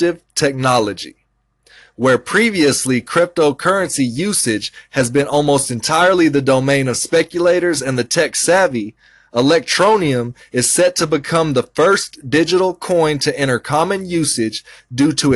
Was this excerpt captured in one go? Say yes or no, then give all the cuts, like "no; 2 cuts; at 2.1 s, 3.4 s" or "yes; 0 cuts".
yes; 0 cuts